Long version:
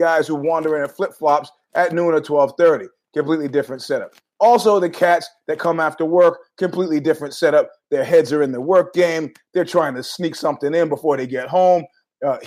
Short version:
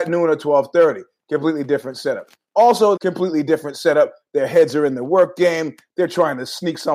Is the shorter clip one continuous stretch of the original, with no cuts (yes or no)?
no